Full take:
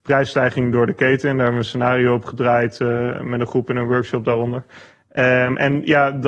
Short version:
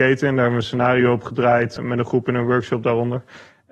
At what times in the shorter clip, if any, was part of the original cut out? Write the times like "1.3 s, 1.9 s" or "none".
1.8 s